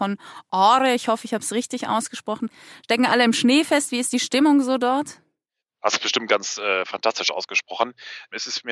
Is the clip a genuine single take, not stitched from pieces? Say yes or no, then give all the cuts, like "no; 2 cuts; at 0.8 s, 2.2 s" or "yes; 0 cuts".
yes; 0 cuts